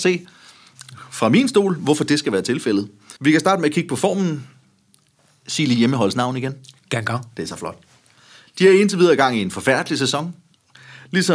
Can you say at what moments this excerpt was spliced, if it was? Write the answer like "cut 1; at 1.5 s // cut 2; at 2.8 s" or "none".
cut 1; at 3.2 s